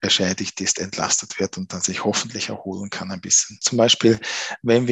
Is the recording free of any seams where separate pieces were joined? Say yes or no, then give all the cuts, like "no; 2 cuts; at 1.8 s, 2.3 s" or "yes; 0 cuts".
no; 1 cut; at 3.6 s